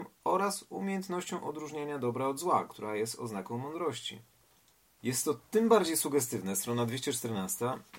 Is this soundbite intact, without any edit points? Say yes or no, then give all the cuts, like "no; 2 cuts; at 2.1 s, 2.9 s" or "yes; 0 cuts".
no; 1 cut; at 5.0 s